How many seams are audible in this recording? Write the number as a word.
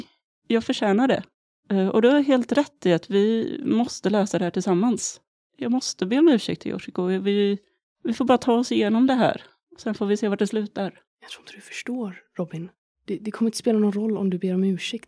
zero